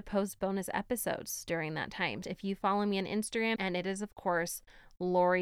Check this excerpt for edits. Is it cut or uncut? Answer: cut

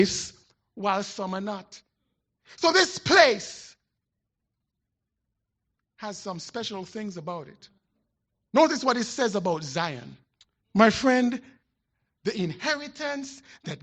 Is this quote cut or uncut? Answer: cut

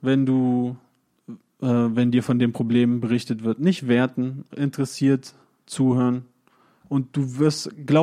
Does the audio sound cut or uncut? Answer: cut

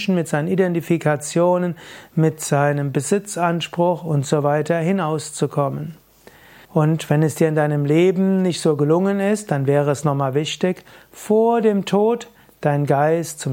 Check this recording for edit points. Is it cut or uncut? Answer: cut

